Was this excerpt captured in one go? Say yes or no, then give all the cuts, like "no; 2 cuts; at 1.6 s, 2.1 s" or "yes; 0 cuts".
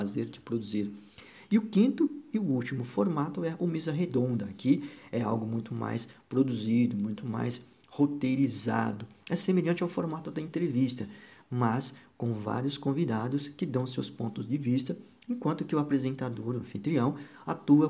yes; 0 cuts